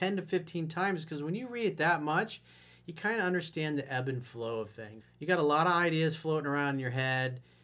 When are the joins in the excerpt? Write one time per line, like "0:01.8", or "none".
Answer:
0:05.0